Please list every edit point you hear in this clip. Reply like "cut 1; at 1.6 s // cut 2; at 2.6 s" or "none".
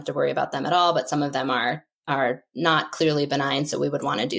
none